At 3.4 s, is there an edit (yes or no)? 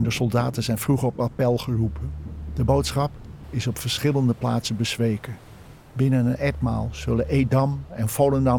yes